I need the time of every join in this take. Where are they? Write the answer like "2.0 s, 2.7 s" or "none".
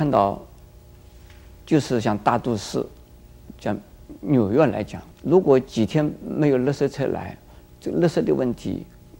5.1 s